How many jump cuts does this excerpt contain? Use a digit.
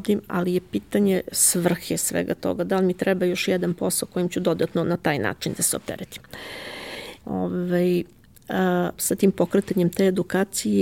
2